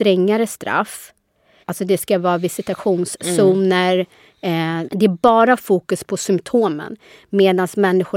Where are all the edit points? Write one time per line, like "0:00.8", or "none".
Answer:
0:01.6
0:04.9